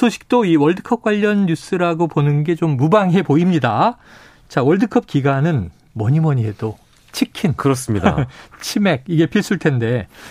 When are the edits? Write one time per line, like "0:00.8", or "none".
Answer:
none